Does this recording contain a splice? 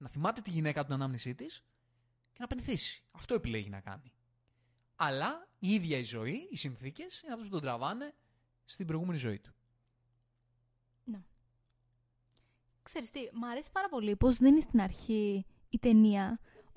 no; 0 cuts

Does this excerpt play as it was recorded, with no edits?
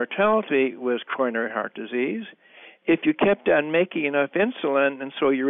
yes; 0 cuts

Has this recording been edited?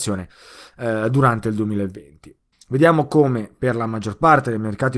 yes; 1 cut; at 2.5 s

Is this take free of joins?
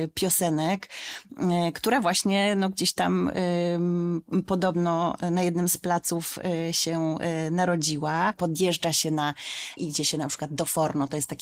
no; 2 cuts; at 8.3 s, 9.8 s

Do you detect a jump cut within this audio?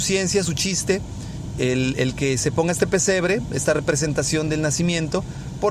no; 0 cuts

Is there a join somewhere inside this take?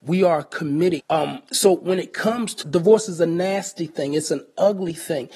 yes; 2 cuts; at 1.0 s, 2.6 s

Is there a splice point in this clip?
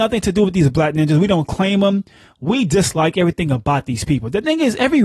no; 0 cuts

